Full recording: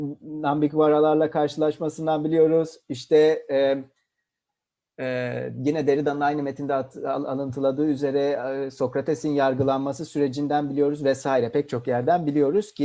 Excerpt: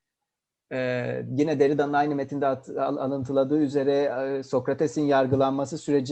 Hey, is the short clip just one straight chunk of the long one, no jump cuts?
yes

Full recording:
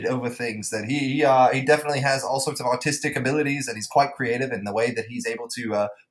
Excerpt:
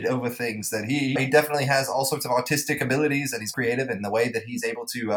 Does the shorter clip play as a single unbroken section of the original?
no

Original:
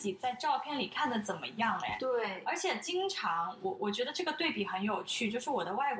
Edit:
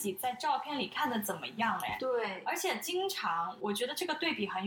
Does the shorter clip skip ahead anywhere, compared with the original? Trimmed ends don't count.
yes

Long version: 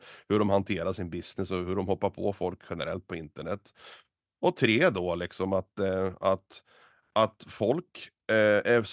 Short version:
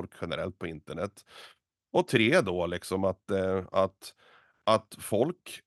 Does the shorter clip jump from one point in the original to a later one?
no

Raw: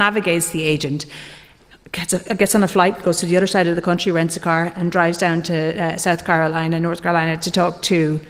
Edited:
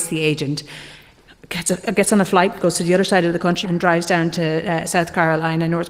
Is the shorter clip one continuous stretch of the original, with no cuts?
no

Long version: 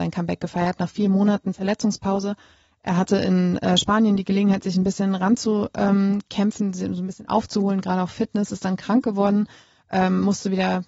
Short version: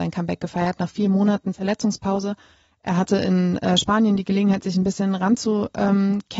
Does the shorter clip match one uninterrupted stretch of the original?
yes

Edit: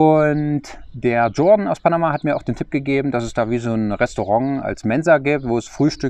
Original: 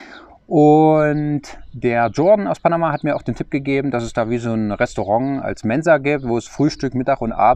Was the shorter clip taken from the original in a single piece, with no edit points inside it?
yes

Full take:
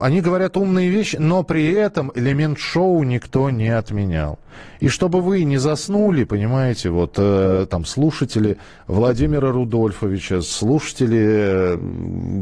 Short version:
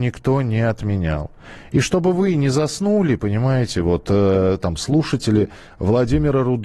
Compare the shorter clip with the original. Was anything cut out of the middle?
no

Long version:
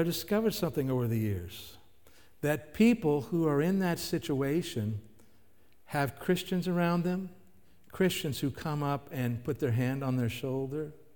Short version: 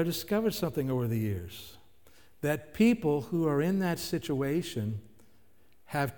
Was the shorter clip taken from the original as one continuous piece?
yes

